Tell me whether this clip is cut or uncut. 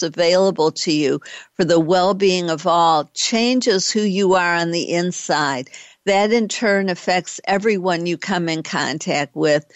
uncut